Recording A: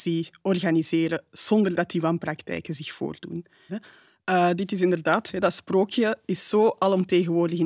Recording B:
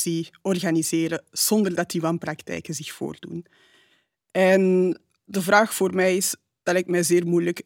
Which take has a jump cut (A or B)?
A